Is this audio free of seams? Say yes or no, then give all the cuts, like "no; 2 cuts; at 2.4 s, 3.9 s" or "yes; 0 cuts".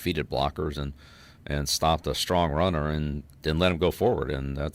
yes; 0 cuts